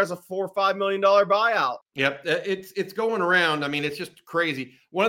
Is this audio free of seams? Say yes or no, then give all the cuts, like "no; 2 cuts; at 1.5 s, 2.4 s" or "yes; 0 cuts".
no; 1 cut; at 1.8 s